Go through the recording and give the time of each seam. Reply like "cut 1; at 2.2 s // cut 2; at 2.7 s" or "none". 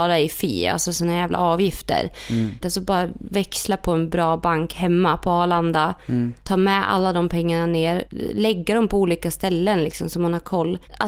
cut 1; at 2.6 s